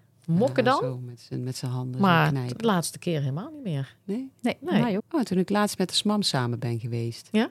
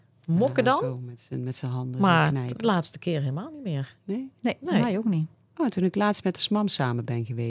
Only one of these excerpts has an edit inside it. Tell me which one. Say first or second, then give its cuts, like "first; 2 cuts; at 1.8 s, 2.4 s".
first; 1 cut; at 5.0 s